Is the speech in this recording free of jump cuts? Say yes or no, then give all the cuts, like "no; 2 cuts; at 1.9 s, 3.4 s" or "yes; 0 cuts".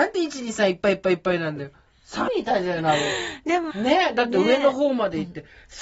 no; 2 cuts; at 2.3 s, 3.7 s